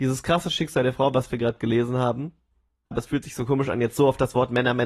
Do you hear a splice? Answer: yes; 1 cut; at 2.9 s

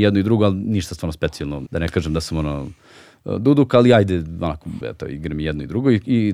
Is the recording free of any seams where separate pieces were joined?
no; 2 cuts; at 1.7 s, 4.8 s

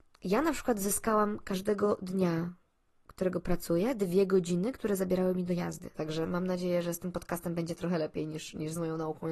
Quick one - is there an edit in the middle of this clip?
yes; 1 cut; at 5.9 s

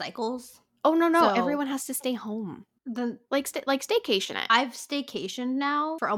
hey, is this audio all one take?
yes; 0 cuts

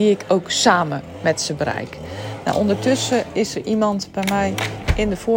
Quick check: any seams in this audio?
no; 0 cuts

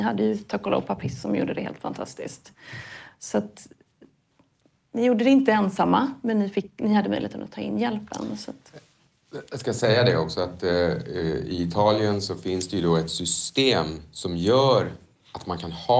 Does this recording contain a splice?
no; 0 cuts

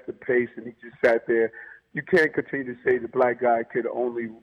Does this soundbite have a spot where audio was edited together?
no; 0 cuts

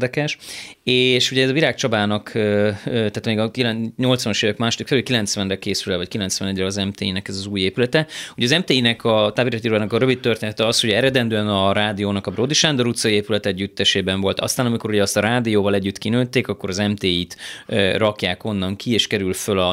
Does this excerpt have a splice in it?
no; 0 cuts

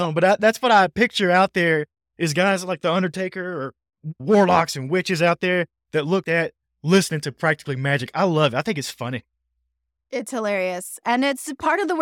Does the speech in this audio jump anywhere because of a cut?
yes; 1 cut; at 6.2 s

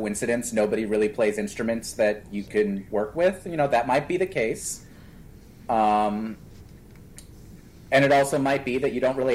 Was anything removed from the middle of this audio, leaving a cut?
no; 0 cuts

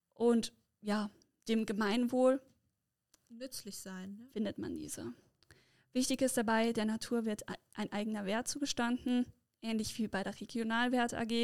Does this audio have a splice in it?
yes; 1 cut; at 4.3 s

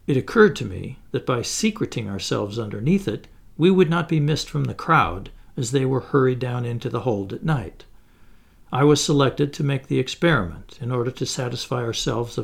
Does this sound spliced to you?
no; 0 cuts

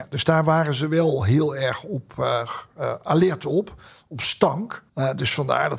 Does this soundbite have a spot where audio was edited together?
yes; 1 cut; at 4.9 s

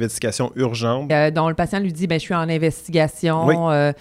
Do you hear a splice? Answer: yes; 1 cut; at 1.1 s

